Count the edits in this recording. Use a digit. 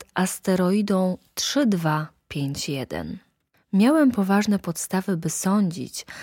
0